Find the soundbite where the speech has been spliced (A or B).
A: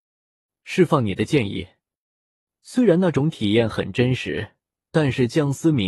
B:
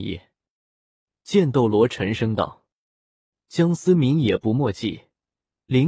A